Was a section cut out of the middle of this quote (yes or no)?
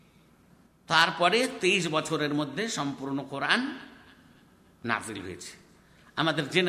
no